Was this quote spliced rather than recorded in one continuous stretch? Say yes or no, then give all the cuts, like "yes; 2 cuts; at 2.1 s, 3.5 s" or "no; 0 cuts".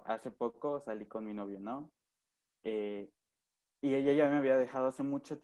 no; 0 cuts